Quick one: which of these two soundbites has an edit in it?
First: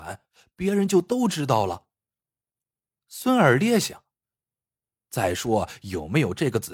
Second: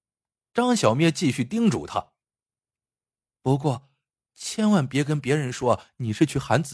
first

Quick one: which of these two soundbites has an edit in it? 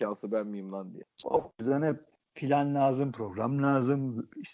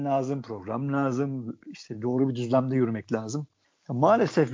first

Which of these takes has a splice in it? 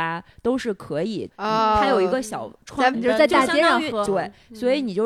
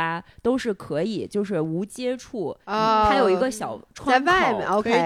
first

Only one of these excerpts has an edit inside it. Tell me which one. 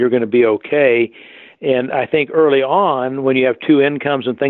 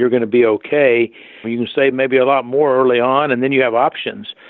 second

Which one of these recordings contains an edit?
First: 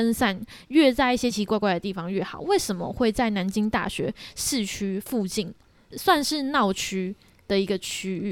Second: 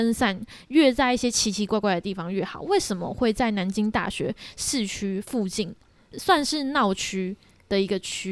first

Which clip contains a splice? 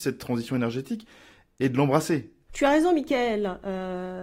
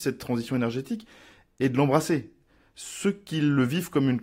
first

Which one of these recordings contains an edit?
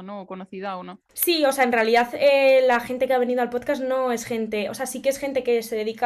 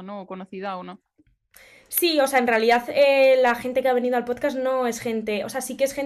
first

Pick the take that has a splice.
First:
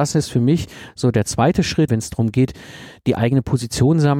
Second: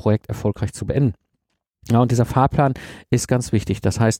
first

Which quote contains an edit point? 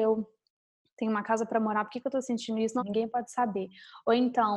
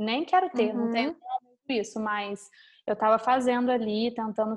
first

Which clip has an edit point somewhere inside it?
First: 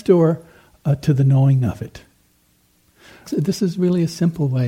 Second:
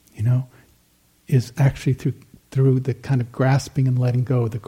first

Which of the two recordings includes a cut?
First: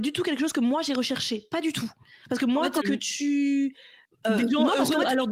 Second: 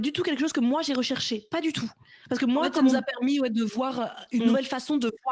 first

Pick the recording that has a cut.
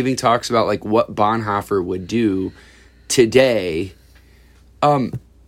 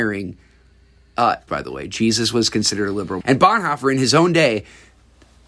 second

